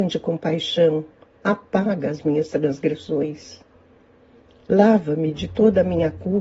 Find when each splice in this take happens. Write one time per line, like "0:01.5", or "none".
none